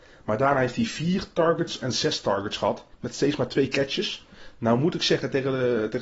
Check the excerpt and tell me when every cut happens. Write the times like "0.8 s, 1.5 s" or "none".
2.9 s